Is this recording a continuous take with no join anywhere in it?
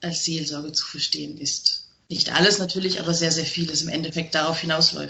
yes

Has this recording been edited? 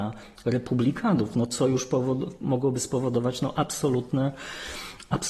no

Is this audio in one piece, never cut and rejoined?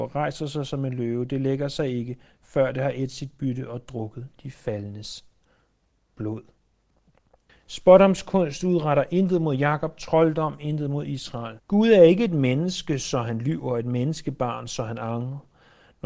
no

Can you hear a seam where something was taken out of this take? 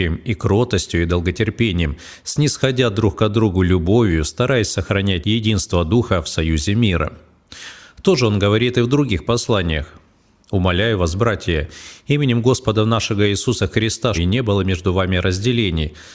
yes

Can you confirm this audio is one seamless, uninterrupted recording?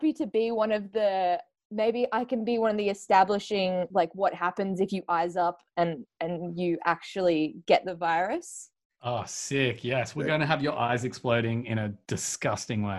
no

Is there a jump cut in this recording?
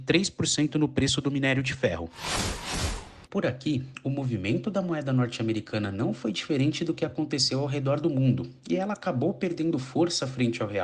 yes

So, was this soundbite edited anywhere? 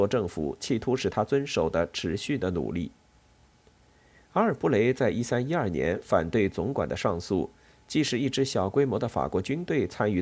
no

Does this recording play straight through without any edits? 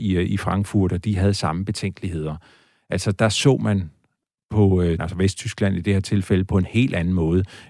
no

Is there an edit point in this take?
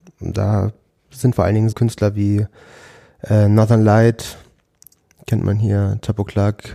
yes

